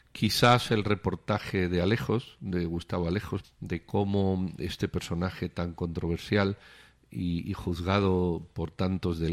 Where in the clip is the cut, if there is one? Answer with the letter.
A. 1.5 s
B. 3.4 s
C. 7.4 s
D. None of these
B